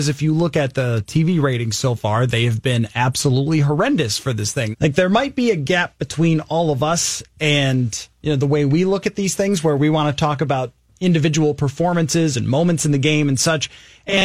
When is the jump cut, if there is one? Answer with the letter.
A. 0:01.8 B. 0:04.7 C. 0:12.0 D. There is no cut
B